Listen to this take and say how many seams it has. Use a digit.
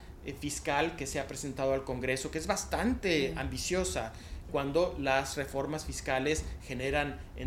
1